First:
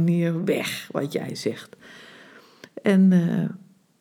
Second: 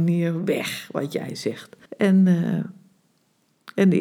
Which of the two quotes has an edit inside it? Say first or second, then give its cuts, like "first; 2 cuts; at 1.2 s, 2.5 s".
second; 1 cut; at 1.8 s